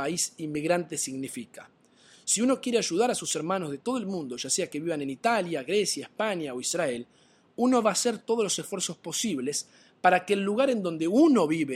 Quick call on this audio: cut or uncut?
uncut